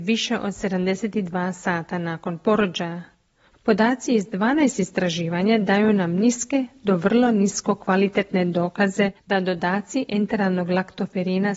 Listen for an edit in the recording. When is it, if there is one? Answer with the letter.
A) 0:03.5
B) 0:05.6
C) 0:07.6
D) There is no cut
A